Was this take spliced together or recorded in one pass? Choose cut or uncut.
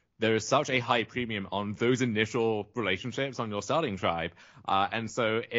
uncut